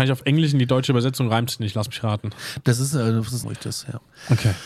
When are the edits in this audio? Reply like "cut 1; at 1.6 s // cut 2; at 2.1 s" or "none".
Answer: cut 1; at 3.4 s